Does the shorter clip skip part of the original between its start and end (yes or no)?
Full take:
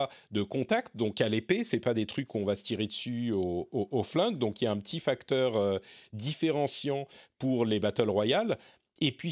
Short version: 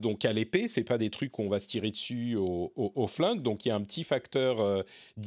no